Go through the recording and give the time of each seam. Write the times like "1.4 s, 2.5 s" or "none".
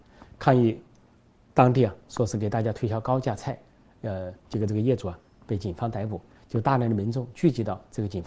4.4 s